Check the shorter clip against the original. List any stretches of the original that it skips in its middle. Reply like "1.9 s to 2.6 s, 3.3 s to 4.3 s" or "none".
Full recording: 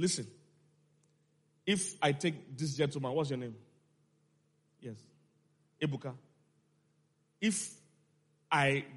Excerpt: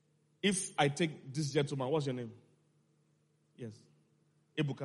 none